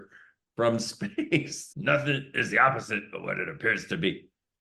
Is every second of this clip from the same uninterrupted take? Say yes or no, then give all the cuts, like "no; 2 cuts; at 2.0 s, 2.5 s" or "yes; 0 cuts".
no; 1 cut; at 1.7 s